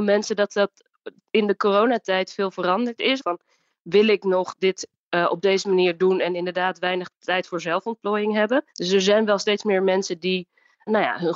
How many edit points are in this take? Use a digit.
2